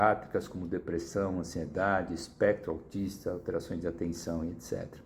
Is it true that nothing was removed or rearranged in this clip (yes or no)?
yes